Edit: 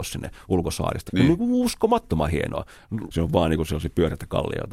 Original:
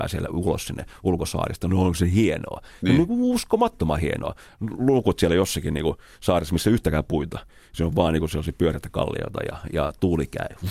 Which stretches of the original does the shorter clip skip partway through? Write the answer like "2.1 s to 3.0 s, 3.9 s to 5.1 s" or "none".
1.6 s to 2.8 s, 4.8 s to 7.7 s